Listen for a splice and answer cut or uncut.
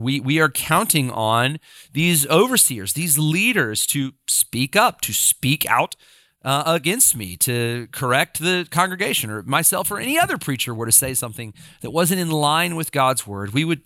uncut